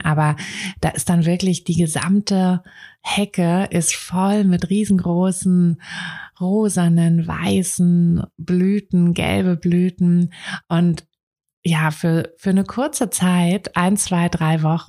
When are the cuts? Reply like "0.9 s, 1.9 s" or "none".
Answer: none